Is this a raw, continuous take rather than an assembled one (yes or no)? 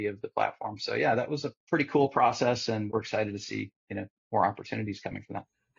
no